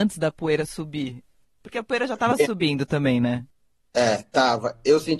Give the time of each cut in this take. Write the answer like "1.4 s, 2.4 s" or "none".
none